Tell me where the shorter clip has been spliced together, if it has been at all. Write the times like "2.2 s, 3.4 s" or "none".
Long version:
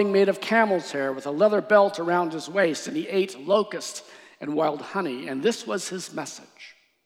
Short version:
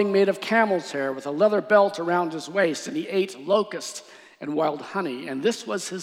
none